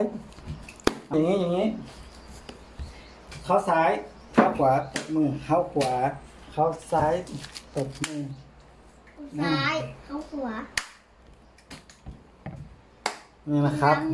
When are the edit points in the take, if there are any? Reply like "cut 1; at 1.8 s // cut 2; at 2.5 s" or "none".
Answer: cut 1; at 1.1 s